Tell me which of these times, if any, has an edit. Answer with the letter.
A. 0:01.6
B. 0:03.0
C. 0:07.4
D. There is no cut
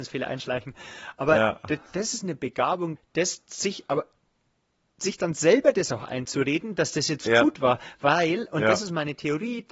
B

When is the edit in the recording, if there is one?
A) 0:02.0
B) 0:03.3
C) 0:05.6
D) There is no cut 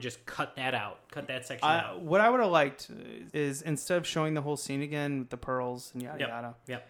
B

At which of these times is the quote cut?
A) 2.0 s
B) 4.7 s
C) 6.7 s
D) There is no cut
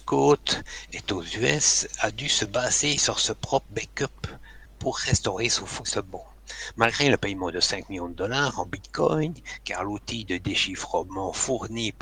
B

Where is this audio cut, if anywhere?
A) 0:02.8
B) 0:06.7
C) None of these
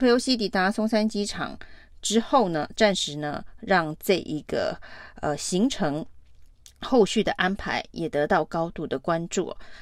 A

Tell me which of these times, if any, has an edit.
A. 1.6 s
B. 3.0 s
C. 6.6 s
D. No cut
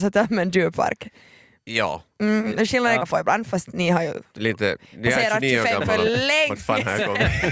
B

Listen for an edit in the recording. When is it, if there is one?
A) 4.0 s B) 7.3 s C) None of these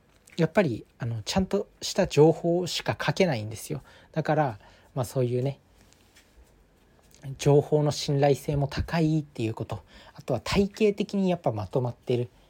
C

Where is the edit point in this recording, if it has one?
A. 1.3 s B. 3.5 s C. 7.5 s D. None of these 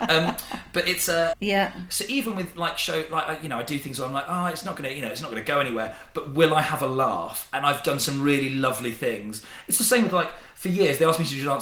A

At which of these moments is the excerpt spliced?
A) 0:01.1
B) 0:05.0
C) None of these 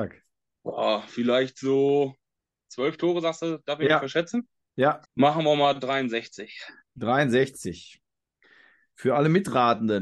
B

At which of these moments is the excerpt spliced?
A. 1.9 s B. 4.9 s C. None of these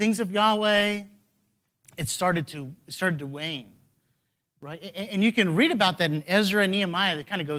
C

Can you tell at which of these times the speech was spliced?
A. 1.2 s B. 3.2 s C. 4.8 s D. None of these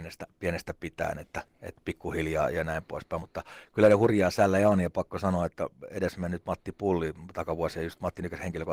D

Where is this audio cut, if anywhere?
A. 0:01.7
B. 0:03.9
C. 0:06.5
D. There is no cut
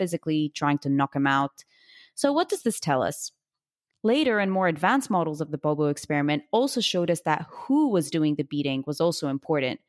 B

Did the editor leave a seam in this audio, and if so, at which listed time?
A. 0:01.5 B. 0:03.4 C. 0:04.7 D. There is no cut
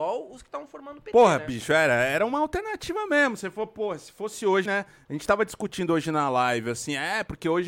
C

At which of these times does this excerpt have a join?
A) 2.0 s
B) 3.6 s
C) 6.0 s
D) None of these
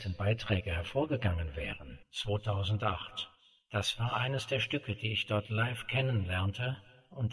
A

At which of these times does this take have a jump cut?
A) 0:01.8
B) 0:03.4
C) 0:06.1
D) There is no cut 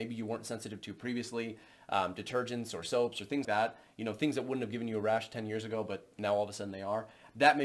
B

